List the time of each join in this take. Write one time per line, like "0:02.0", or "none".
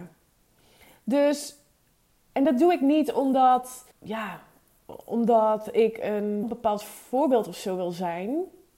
0:03.9
0:06.4